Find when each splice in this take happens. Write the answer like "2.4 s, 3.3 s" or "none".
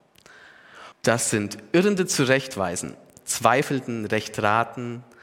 0.9 s, 3.1 s